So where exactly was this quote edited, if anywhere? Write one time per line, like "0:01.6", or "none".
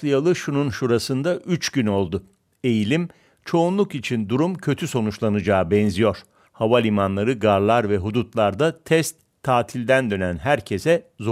0:06.4